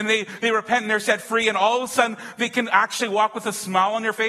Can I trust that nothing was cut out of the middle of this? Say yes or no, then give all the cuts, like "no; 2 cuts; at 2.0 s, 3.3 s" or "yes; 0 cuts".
yes; 0 cuts